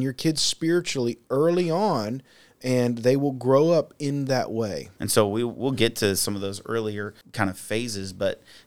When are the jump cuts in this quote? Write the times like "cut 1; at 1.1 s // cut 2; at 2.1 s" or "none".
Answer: cut 1; at 5.0 s // cut 2; at 7.2 s